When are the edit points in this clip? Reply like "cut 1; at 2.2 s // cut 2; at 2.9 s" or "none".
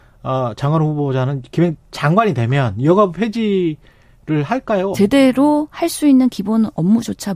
cut 1; at 4.9 s

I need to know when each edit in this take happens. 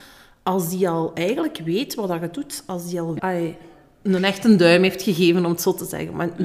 cut 1; at 3.2 s

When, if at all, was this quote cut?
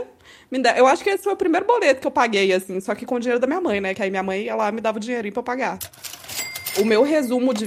none

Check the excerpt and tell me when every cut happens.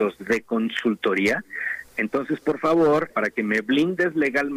cut 1; at 1.9 s // cut 2; at 3.1 s

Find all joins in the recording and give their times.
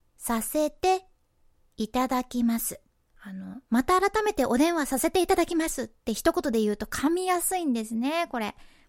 cut 1; at 3.0 s

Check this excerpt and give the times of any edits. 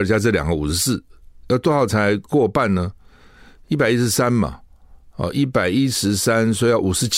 none

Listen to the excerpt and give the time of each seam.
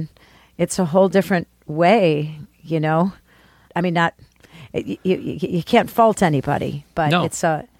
cut 1; at 3.7 s

